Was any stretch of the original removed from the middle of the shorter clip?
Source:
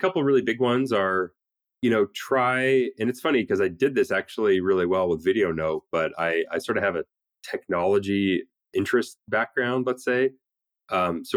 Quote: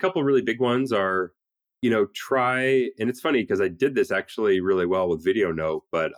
no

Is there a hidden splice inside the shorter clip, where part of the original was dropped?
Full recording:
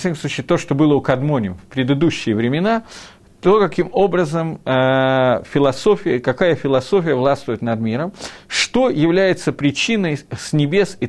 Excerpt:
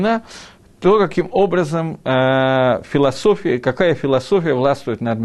no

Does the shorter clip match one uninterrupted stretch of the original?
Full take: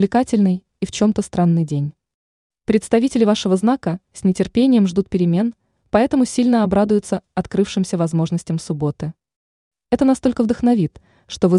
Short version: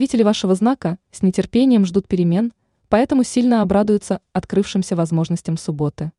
yes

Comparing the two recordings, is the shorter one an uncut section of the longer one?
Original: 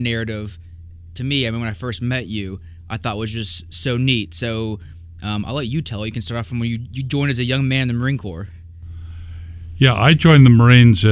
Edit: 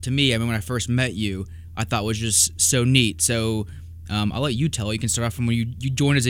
yes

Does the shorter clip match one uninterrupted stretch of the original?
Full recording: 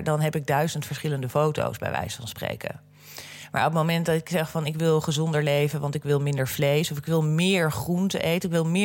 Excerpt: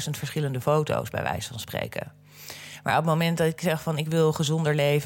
yes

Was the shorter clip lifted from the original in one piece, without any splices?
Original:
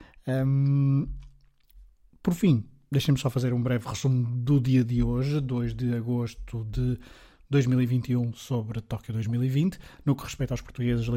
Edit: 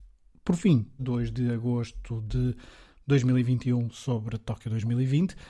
no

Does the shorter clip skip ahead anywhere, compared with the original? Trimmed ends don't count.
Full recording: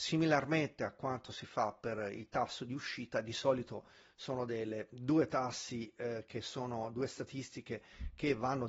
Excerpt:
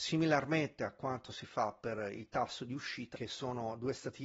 yes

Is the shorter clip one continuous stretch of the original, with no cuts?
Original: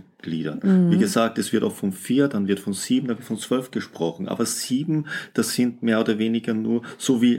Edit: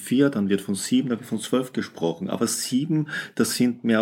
yes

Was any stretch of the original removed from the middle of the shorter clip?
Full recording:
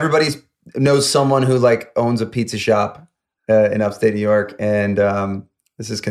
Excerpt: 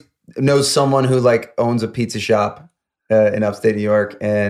no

